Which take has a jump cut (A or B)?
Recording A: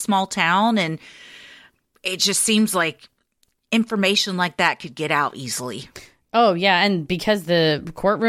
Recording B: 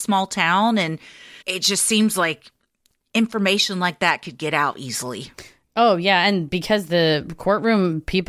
B